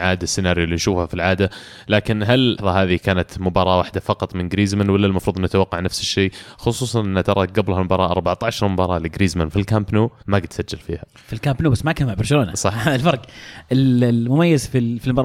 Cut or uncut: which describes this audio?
cut